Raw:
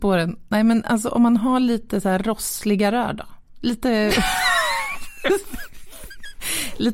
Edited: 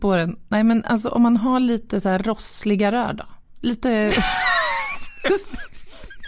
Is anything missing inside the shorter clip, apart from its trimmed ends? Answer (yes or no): no